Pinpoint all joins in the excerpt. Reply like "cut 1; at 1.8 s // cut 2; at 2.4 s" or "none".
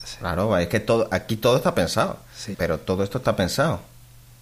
cut 1; at 2.5 s